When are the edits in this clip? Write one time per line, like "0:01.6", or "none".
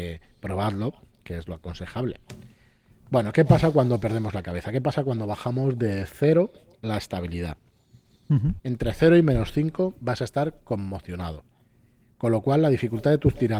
0:08.6